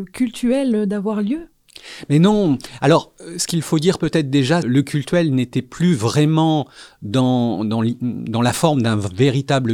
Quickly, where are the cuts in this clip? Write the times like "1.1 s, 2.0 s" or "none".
4.6 s